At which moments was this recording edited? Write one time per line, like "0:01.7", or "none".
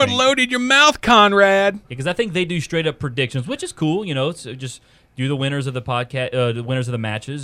0:01.8